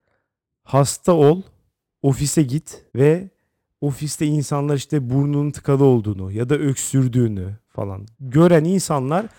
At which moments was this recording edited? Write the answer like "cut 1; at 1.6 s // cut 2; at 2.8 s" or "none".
cut 1; at 2.9 s // cut 2; at 8.1 s